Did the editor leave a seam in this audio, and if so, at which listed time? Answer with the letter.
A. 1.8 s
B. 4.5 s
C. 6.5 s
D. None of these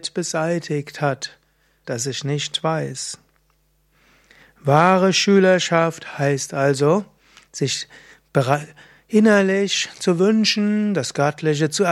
A